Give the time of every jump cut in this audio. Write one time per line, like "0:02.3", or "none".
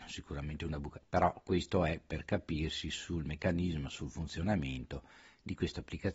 0:01.0